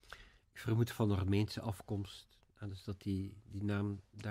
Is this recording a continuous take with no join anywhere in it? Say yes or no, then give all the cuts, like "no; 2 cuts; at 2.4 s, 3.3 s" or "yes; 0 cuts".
yes; 0 cuts